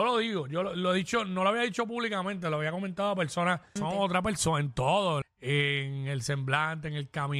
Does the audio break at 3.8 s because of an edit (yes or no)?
yes